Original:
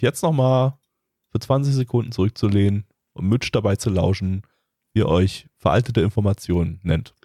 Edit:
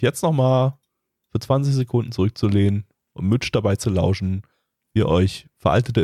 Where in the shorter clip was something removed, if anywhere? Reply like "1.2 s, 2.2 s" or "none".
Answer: none